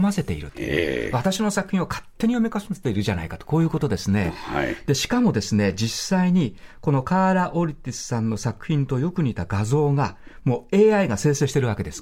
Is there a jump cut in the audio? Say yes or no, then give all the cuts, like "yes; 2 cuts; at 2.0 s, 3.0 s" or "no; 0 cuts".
no; 0 cuts